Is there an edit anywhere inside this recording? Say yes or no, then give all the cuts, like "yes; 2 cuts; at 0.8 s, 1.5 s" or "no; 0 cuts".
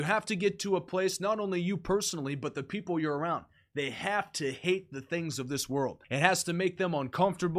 yes; 1 cut; at 6.0 s